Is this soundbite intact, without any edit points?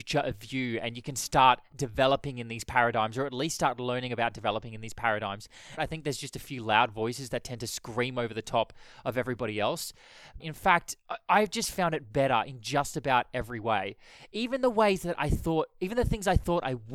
no; 2 cuts; at 5.8 s, 10.4 s

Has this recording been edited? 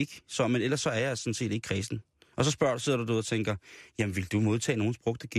no; 0 cuts

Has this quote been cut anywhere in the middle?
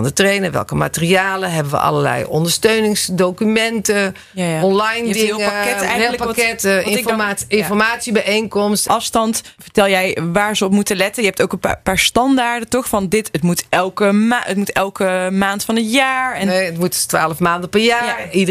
yes; 1 cut; at 8.9 s

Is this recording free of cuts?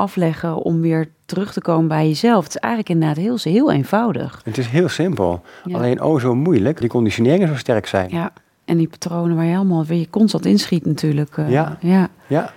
no; 1 cut; at 6.8 s

